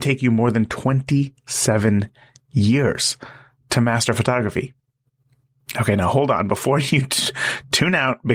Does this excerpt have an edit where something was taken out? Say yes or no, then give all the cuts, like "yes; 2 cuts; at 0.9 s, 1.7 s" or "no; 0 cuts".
no; 0 cuts